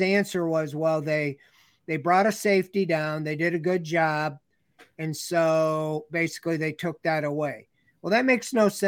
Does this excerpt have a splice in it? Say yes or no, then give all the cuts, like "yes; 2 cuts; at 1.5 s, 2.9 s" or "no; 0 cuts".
no; 0 cuts